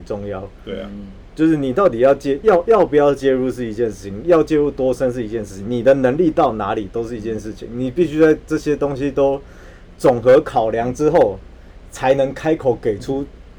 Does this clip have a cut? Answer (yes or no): no